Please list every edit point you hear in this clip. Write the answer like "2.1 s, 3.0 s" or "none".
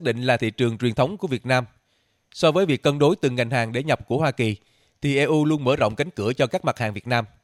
none